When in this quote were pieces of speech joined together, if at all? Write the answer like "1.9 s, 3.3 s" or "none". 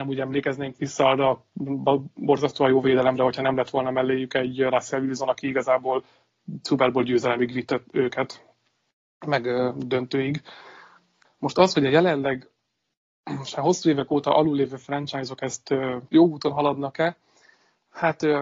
11.3 s, 16.1 s